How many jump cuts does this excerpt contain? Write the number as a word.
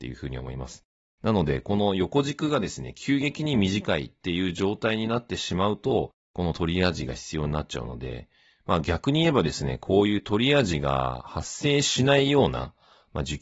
two